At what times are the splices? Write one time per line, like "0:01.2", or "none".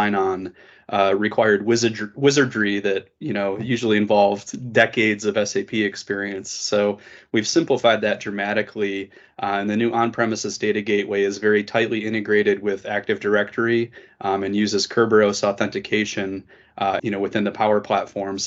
0:17.0